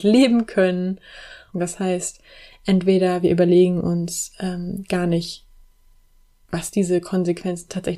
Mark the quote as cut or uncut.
cut